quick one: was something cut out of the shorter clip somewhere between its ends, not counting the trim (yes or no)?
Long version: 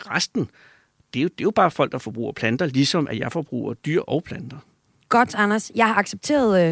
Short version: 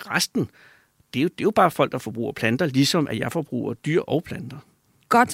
no